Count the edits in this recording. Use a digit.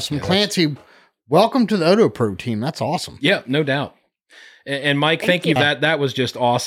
1